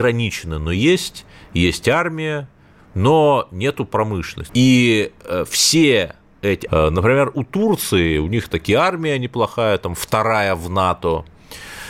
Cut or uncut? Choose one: cut